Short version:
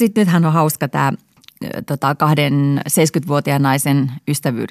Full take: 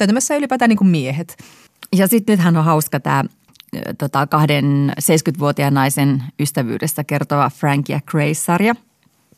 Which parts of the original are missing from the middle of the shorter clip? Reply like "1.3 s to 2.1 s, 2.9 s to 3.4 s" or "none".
none